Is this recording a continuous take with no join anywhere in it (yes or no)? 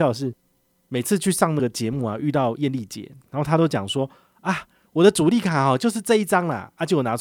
yes